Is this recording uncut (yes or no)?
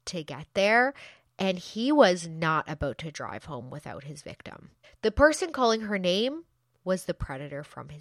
no